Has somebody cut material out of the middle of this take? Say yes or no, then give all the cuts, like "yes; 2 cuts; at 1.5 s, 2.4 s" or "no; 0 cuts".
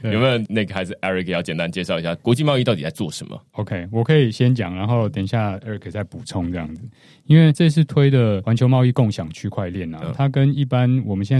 no; 0 cuts